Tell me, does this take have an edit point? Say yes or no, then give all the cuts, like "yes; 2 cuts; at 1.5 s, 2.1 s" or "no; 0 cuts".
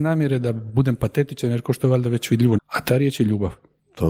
yes; 1 cut; at 2.6 s